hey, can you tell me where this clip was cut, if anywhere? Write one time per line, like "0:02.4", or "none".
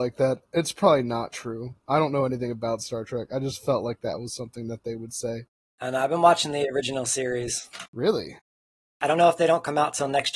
0:07.9